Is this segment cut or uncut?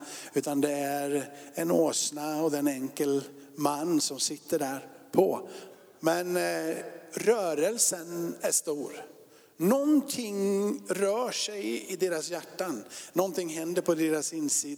uncut